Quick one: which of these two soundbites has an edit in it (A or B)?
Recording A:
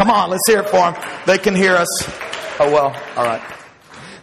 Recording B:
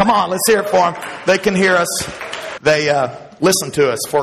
B